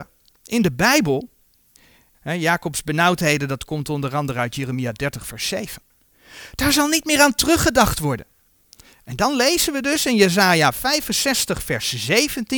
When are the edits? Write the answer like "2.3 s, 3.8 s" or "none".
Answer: 2.1 s